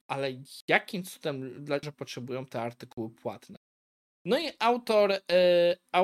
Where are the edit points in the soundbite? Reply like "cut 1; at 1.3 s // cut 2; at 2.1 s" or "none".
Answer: cut 1; at 1.8 s